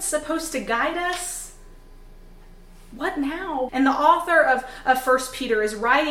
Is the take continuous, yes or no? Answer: no